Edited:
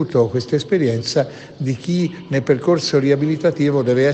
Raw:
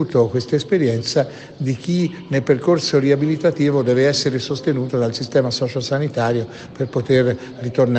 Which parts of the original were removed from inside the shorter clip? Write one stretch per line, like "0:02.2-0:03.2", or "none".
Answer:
none